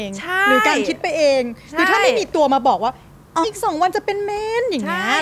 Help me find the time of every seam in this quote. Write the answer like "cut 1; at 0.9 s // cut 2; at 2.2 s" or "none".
cut 1; at 3.4 s